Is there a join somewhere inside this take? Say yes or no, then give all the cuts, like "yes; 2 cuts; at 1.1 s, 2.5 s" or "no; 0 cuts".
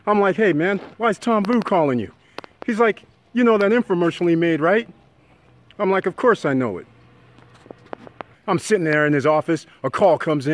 yes; 1 cut; at 8.3 s